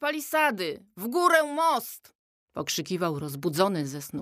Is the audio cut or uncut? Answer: uncut